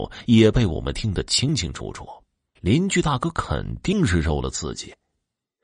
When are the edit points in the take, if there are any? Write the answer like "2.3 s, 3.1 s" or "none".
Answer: 2.6 s